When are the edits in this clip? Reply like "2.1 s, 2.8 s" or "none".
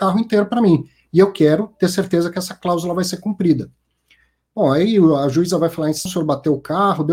6.1 s